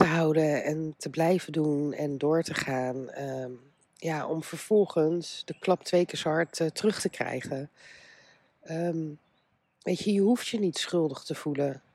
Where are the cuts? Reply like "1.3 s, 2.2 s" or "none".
none